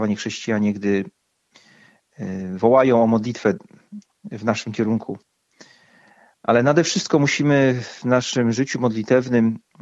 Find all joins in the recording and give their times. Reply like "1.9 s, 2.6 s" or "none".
none